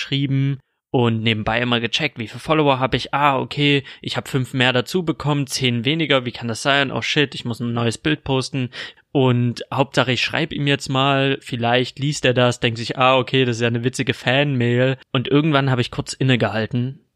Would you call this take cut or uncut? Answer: cut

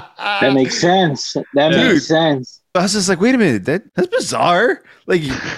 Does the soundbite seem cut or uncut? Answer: cut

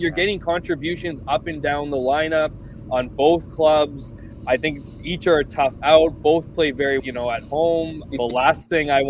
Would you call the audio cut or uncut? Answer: cut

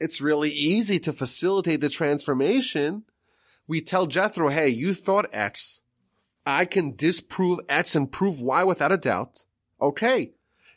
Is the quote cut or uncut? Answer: uncut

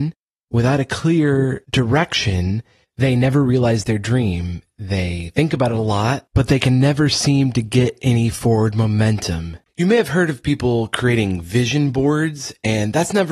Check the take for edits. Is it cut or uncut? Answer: uncut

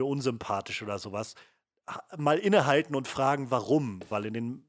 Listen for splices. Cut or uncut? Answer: uncut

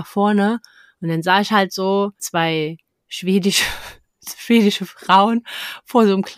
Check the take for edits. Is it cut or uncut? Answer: cut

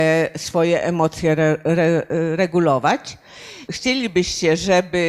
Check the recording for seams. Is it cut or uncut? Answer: uncut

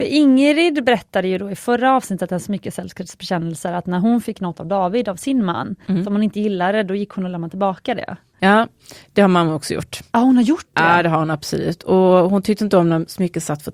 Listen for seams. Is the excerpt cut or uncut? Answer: uncut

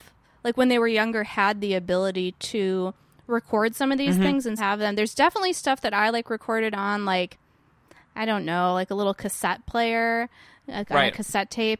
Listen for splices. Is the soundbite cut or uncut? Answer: cut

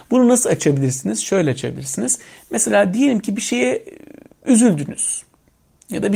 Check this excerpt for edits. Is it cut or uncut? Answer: uncut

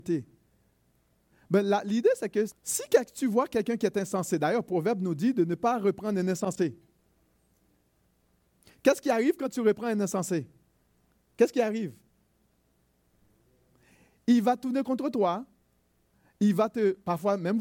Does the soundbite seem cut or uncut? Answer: cut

